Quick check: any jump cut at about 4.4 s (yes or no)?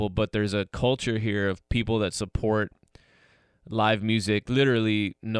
yes